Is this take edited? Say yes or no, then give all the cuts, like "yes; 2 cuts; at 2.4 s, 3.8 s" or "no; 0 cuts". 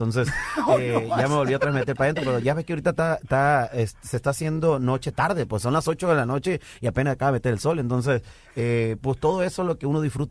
no; 0 cuts